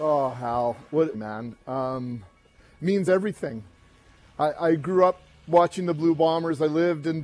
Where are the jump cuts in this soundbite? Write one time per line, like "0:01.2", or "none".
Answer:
0:01.1